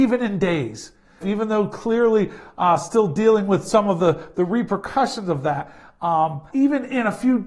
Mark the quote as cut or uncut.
cut